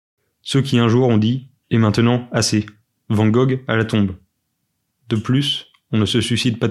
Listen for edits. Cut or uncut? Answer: cut